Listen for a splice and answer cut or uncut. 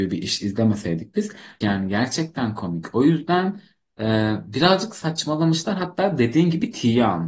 cut